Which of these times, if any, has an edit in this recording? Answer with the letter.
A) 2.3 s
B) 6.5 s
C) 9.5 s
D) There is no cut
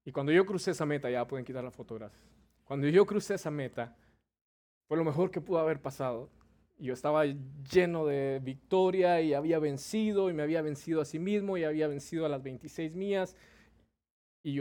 D